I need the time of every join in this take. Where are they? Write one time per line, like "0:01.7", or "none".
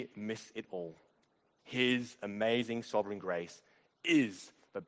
0:01.6